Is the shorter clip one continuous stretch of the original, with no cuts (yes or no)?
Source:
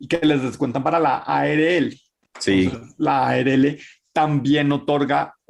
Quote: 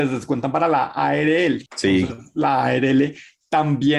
no